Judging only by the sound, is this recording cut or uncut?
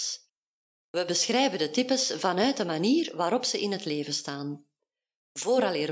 uncut